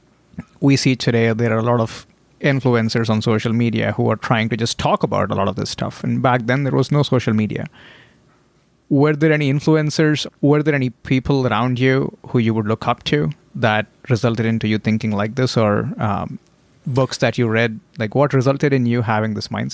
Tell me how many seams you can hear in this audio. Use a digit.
1